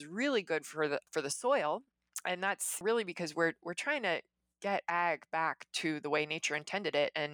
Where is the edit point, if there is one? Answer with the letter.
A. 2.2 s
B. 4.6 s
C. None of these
C